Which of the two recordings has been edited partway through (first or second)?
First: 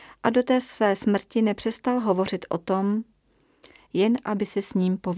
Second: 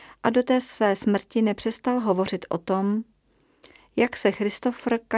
first